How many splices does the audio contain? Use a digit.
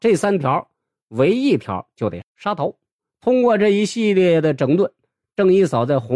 1